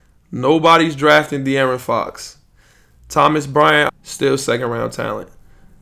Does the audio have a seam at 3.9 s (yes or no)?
yes